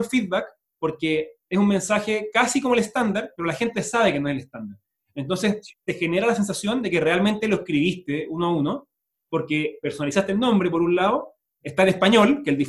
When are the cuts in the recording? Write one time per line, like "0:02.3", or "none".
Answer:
none